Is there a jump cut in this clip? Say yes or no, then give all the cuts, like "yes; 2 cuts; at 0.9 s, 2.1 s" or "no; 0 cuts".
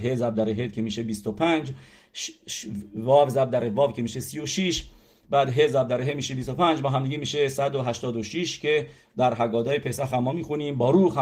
no; 0 cuts